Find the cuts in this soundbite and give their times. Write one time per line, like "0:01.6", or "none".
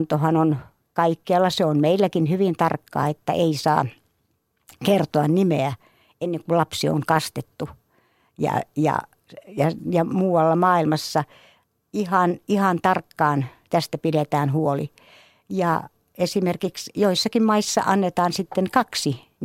none